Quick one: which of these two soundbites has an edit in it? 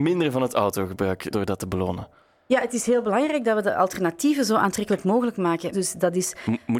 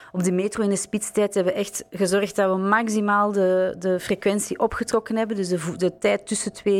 first; 2 cuts; at 1.3 s, 5.7 s

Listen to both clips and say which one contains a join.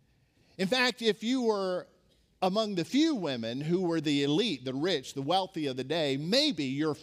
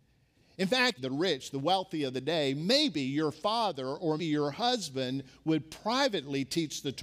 second; 2 cuts; at 1.0 s, 4.2 s

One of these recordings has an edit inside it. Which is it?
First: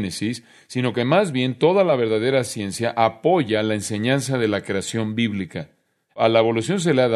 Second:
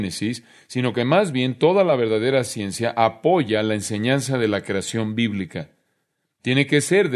first; 1 cut; at 6.1 s

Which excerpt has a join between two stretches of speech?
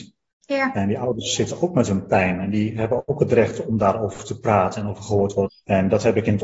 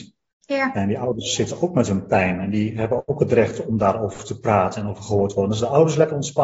first; 1 cut; at 5.5 s

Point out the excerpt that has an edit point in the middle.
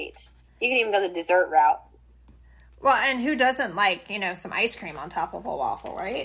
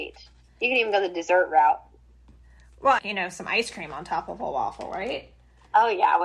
second; 1 cut; at 3.0 s

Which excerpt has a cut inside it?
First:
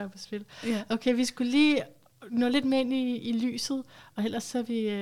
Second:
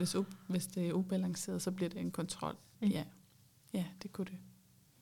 second; 1 cut; at 2.7 s

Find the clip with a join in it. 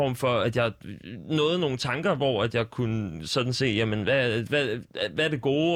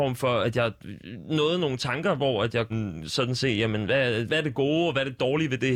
second; 2 cuts; at 2.7 s, 4.3 s

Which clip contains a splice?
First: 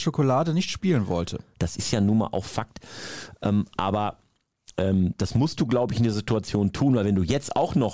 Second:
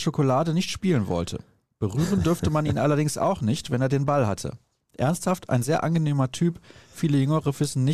first; 1 cut; at 1.5 s

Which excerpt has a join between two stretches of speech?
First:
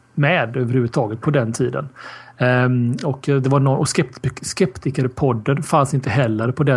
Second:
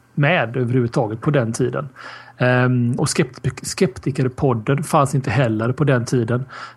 second; 1 cut; at 3.0 s

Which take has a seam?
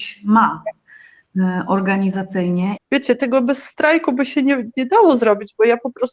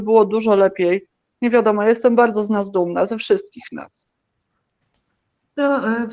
first; 1 cut; at 2.8 s

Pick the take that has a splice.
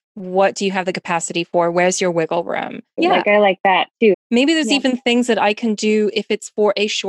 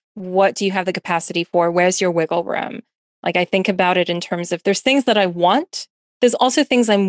first; 2 cuts; at 3.0 s, 4.1 s

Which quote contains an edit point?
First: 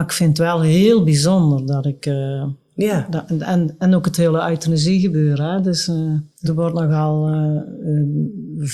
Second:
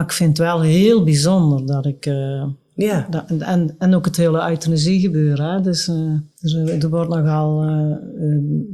first; 1 cut; at 6.4 s

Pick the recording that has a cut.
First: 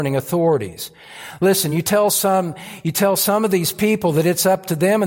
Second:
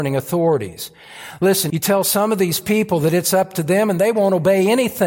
second; 1 cut; at 1.7 s

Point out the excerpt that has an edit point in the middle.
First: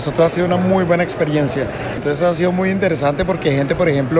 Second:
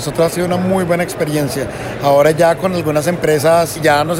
first; 1 cut; at 2.0 s

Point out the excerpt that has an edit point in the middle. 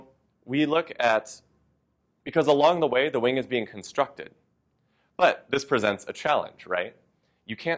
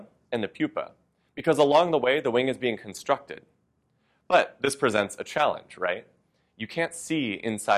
first; 1 cut; at 2.2 s

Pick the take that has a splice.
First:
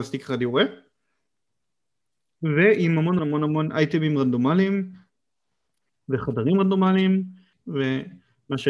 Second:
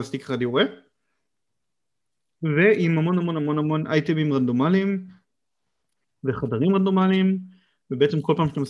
first; 2 cuts; at 3.2 s, 7.5 s

